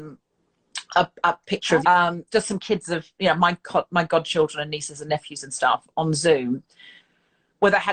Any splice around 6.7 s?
no; 1 cut; at 1.8 s

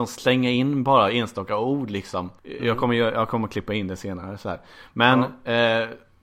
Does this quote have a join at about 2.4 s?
yes; 1 cut; at 2.4 s

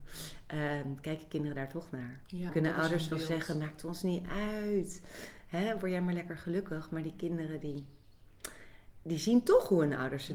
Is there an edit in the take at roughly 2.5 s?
yes; 1 cut; at 2.5 s

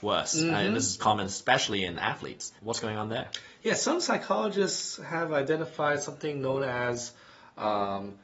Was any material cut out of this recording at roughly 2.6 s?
yes; 2 cuts; at 1.0 s, 2.6 s

